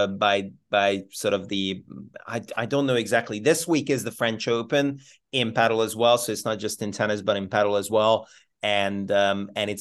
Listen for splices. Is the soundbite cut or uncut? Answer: uncut